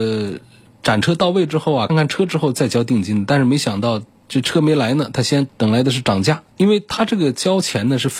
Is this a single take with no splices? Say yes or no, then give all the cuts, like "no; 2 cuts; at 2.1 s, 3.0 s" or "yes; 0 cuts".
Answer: no; 2 cuts; at 1.9 s, 6.6 s